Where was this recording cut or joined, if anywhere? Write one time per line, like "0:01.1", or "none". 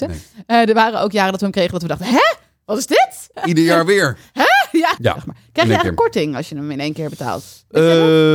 0:03.3
0:05.0